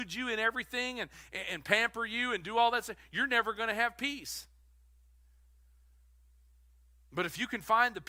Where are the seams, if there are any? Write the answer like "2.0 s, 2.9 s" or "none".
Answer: none